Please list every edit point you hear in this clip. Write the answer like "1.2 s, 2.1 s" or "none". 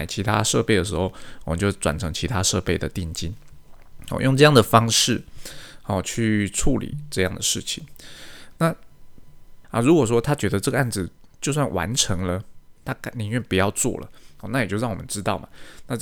8.5 s, 9.6 s, 12.8 s